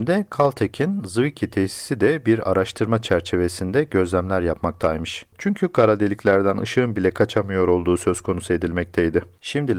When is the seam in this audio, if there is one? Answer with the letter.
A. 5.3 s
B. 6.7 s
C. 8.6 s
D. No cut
A